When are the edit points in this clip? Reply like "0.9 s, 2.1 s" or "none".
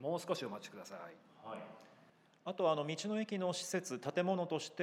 none